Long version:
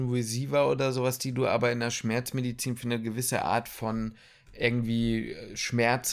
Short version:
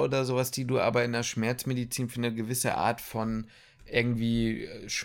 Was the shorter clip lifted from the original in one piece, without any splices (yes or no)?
yes